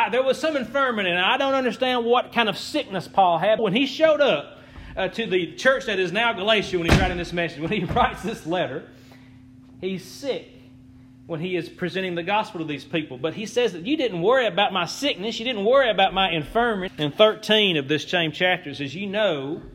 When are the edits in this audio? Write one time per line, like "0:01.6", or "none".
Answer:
0:03.6
0:16.9